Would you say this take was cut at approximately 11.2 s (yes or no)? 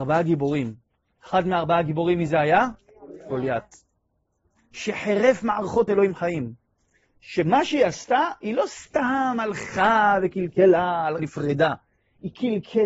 yes